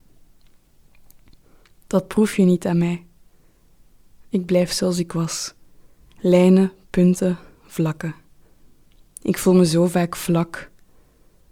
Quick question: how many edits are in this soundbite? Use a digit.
0